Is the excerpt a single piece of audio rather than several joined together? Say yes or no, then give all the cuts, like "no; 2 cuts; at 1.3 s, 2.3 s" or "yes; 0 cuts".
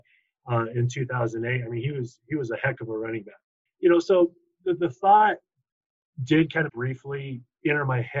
no; 2 cuts; at 3.7 s, 6.7 s